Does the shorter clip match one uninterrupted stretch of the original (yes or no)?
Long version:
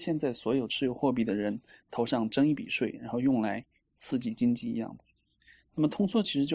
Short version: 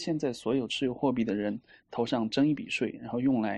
yes